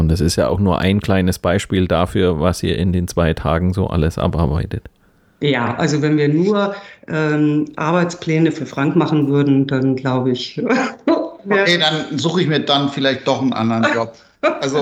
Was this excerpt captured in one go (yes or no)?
yes